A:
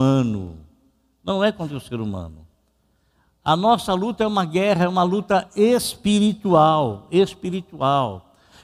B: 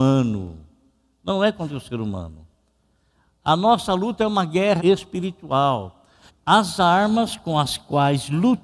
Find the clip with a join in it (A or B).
B